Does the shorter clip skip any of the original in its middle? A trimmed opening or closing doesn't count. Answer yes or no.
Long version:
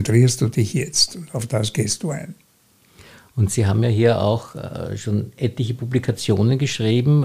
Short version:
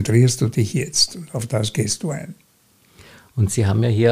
no